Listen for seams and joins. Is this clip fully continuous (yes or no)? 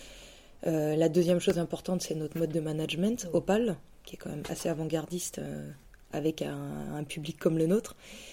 yes